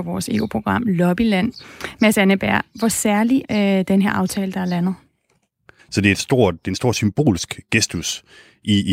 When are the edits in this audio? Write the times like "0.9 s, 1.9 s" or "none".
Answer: 3.4 s, 5.8 s